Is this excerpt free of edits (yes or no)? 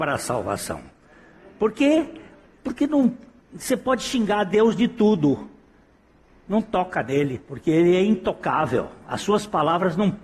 yes